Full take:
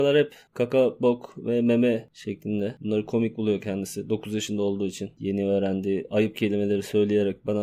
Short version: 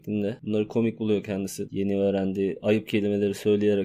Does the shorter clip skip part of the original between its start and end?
yes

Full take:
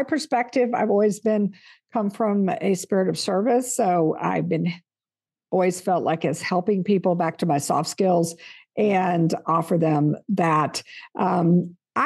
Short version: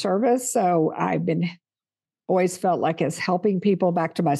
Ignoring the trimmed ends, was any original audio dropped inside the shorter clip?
no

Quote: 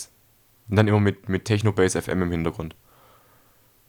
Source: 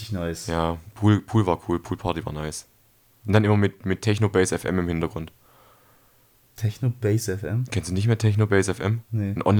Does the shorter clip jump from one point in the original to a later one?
no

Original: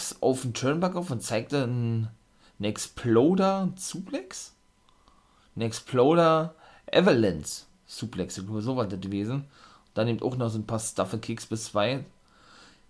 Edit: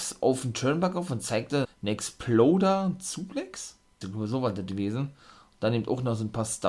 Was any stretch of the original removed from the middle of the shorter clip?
yes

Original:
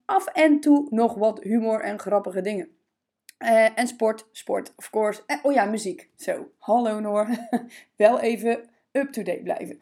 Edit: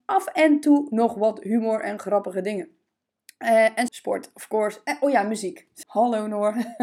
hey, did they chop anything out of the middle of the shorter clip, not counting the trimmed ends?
yes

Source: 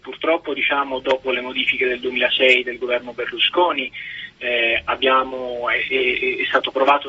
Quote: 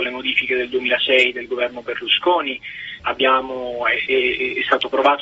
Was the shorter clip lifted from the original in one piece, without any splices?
no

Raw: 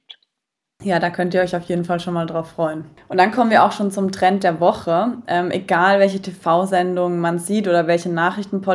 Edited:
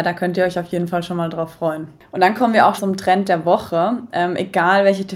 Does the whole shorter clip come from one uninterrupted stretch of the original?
no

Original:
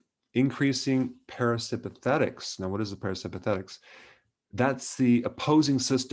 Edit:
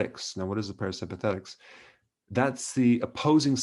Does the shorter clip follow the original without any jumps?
yes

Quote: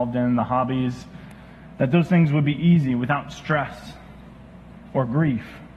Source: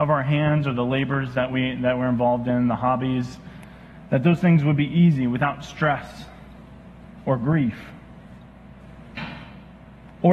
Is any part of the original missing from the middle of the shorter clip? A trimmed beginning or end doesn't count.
no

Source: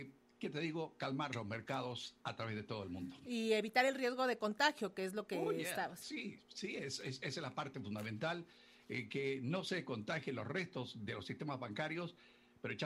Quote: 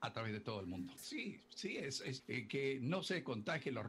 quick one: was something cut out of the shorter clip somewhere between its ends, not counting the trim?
yes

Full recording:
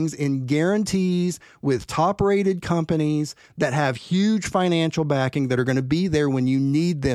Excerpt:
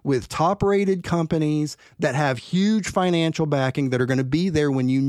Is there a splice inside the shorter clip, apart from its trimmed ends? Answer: no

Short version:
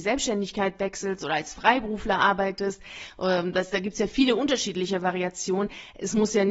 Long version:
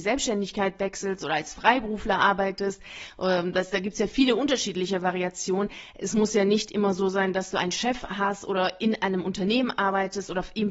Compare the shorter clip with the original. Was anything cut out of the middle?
no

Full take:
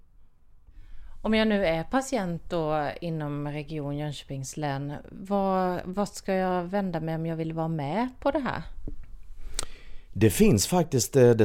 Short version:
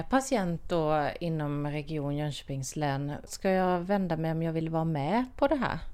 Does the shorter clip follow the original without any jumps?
no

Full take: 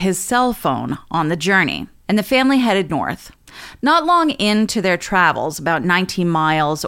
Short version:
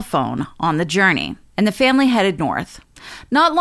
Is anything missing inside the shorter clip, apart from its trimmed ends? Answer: no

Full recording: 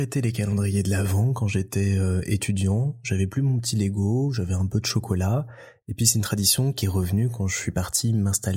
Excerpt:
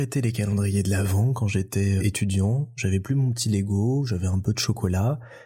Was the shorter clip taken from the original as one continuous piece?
no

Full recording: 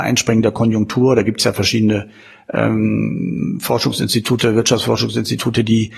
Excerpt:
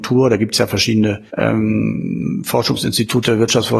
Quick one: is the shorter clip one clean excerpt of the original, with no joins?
no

